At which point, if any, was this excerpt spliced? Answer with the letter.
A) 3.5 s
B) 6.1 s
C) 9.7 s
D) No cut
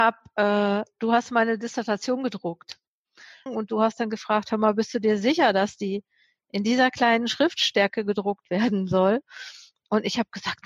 A